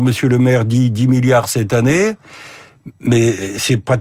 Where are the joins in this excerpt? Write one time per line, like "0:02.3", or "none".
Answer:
none